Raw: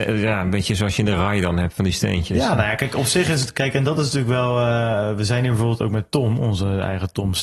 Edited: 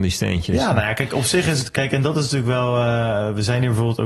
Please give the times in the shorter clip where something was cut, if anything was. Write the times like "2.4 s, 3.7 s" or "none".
none